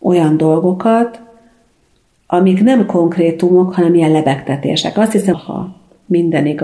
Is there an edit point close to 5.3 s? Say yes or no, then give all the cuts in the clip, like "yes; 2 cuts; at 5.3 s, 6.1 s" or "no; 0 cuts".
yes; 1 cut; at 5.3 s